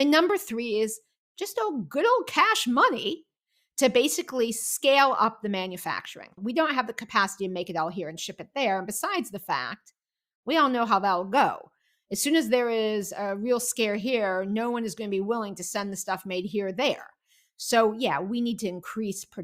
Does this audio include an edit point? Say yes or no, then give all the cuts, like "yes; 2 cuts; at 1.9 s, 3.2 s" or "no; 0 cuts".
yes; 1 cut; at 6.4 s